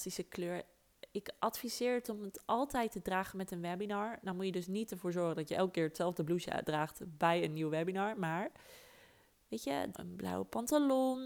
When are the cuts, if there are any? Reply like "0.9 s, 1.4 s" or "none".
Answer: 9.9 s